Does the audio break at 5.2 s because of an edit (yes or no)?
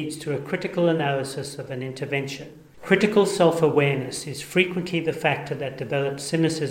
no